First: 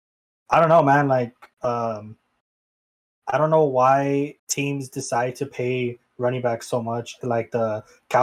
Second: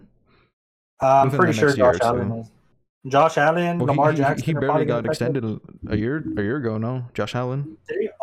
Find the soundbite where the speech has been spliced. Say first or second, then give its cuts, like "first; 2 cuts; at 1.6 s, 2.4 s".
first; 2 cuts; at 4.4 s, 7.2 s